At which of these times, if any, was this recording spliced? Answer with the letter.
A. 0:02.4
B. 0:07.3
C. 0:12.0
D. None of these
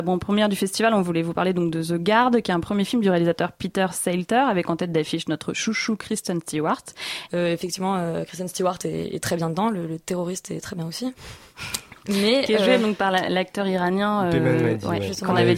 B